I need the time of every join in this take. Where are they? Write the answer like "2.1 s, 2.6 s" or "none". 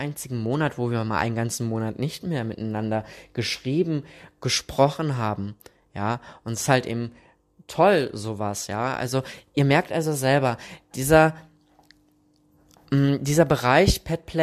none